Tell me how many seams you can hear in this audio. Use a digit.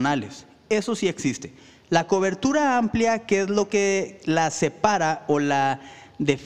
0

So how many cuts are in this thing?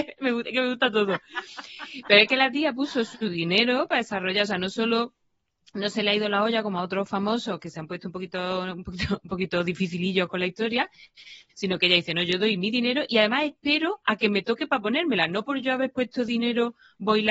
0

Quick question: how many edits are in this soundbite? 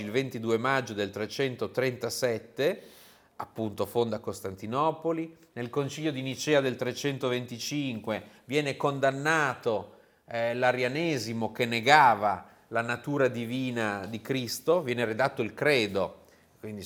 0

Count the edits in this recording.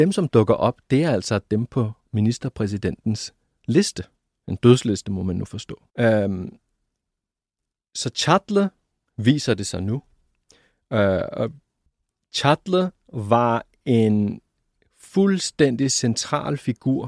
1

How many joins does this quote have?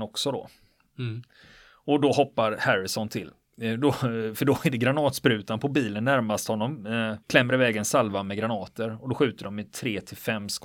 1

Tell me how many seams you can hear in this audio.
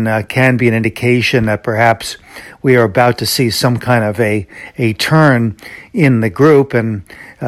0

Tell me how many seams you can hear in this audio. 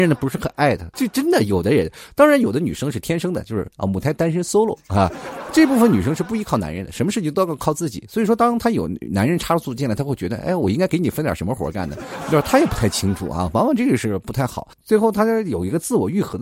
2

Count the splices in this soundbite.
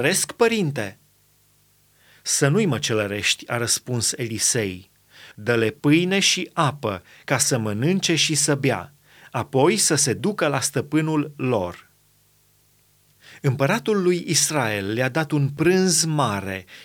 1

